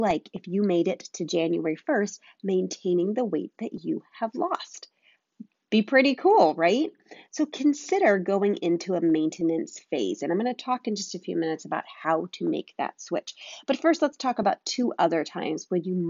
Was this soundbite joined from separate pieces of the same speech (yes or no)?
no